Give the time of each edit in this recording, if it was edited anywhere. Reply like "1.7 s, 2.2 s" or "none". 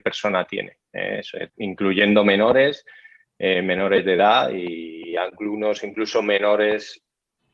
1.5 s